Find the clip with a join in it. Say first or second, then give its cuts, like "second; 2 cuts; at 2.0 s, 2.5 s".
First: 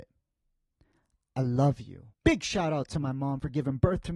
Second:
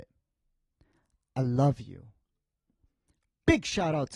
first; 1 cut; at 2.1 s